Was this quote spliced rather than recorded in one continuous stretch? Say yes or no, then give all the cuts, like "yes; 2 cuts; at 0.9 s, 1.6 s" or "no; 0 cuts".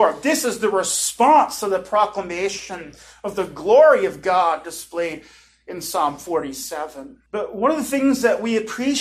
yes; 1 cut; at 7.3 s